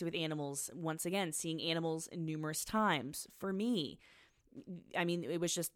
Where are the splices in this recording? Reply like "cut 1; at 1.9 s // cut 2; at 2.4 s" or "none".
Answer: none